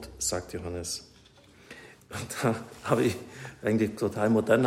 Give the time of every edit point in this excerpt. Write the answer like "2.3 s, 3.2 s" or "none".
2.0 s